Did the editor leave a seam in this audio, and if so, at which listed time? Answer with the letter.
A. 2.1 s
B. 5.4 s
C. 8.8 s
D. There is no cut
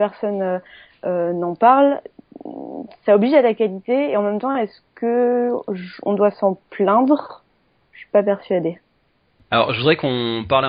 D